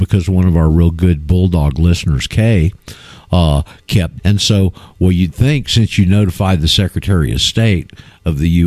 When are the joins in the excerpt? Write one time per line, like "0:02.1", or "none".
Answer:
0:04.2